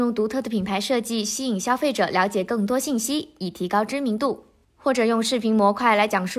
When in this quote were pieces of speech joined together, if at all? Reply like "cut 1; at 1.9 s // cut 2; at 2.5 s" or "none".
none